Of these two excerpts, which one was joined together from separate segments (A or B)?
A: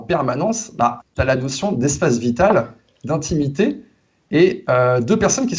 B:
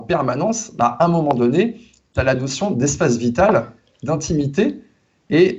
A